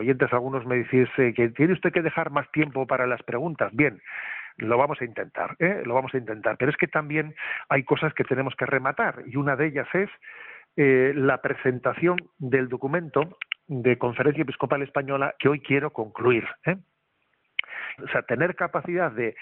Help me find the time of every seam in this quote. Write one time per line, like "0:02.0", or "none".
0:15.4
0:18.0